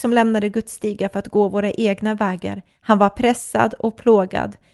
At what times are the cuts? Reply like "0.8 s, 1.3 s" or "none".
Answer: 2.7 s

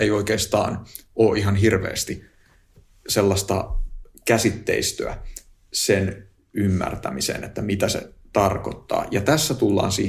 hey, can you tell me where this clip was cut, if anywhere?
none

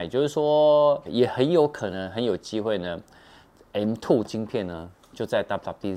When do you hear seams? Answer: 1.1 s

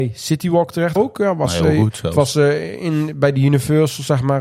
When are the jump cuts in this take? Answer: 1.0 s

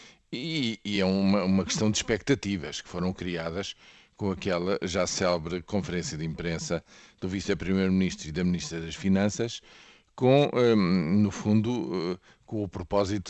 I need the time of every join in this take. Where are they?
none

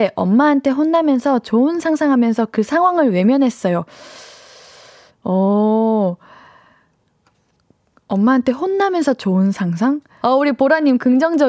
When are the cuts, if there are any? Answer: 10.2 s

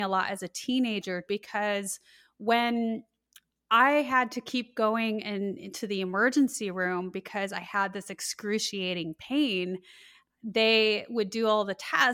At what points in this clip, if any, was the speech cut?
1.3 s

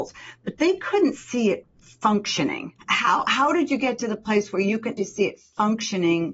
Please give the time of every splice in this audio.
2.8 s, 5.0 s

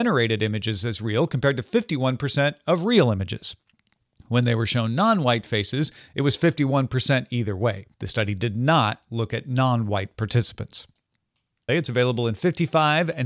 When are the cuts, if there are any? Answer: 7.9 s, 11.7 s

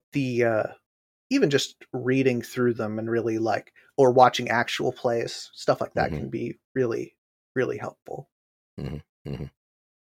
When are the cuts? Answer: none

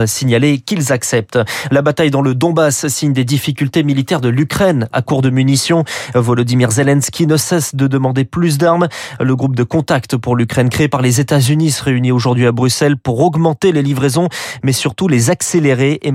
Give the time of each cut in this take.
none

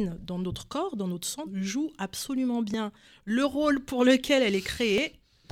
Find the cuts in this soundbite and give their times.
1.4 s

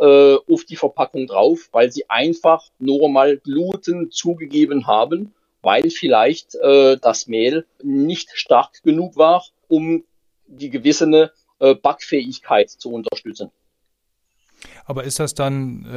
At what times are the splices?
7.8 s, 9.6 s

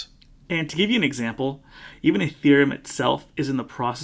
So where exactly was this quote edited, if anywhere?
none

